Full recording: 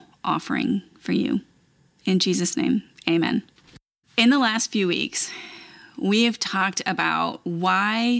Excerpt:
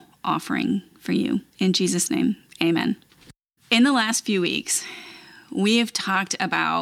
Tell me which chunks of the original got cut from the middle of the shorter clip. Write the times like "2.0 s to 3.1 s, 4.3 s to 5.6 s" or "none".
1.5 s to 1.9 s